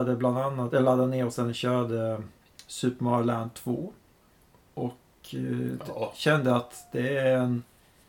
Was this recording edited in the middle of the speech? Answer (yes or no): no